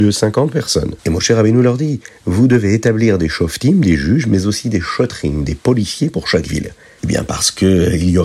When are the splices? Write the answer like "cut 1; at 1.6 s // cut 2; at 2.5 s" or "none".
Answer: cut 1; at 1.0 s // cut 2; at 7.0 s